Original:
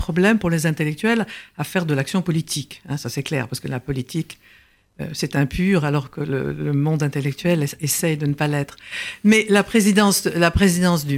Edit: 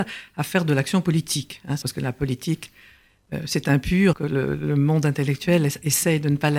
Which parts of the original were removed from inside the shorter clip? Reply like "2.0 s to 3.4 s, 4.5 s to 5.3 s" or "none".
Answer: 3.0 s to 3.5 s, 5.8 s to 6.1 s